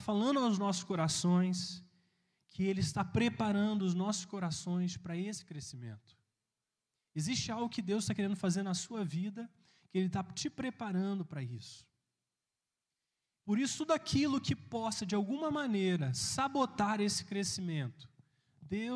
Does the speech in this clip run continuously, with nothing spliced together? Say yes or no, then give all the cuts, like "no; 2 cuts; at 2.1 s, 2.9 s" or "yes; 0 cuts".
yes; 0 cuts